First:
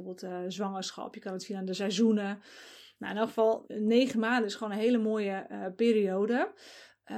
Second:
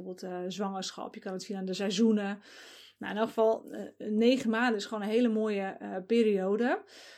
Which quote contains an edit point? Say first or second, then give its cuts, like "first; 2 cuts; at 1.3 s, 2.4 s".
first; 1 cut; at 3.6 s